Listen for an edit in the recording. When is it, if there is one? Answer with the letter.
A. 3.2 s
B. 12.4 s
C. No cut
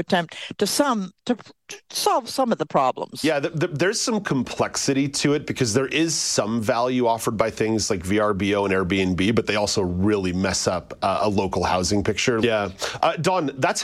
B